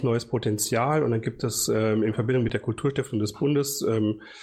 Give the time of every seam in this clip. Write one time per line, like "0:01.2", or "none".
none